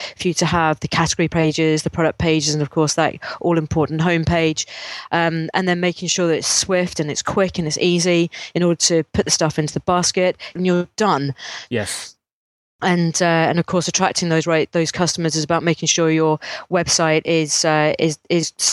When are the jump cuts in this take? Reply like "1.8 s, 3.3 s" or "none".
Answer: 10.6 s, 11.7 s